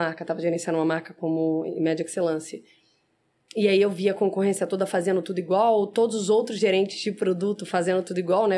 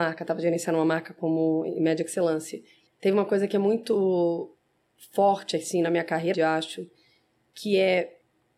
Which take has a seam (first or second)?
second